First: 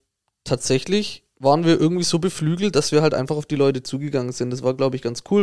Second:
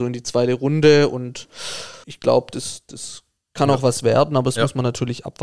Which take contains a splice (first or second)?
second